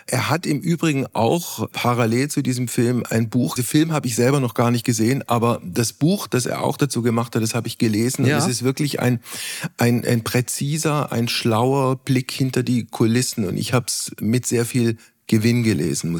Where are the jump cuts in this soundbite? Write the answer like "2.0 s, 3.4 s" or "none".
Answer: 3.6 s